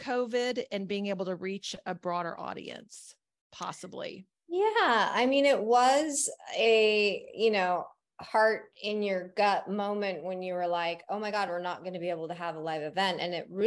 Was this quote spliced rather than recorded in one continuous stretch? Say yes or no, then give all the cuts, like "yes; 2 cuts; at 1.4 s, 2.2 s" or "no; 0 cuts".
no; 0 cuts